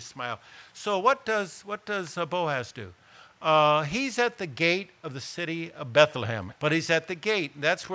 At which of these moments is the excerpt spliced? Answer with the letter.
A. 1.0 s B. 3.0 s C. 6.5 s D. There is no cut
C